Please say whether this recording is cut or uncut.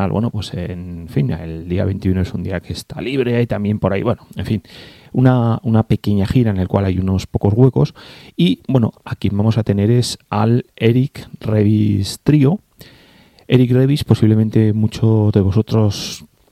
uncut